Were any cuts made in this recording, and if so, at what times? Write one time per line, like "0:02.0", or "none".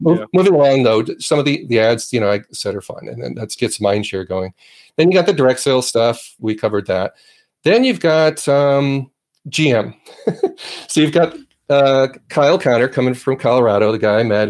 0:03.6
0:06.4